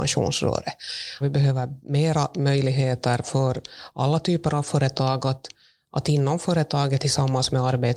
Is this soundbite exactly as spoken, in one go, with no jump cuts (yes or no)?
no